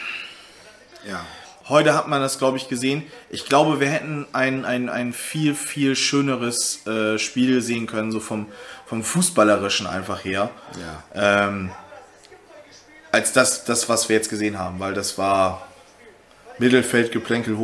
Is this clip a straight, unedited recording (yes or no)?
no